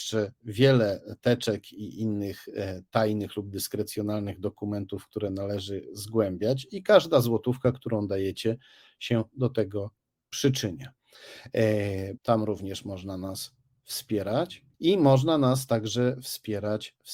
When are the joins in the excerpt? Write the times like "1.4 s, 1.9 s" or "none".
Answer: 12.2 s, 14.7 s